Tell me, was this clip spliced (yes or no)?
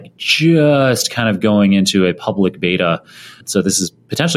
yes